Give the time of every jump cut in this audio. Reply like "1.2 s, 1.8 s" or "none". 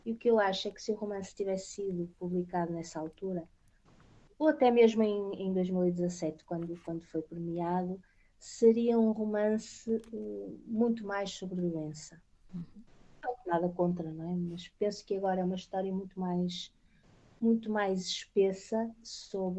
none